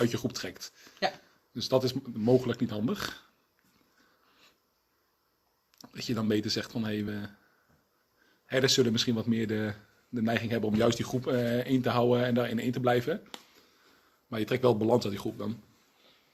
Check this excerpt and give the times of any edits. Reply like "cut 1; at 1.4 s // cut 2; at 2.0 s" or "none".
none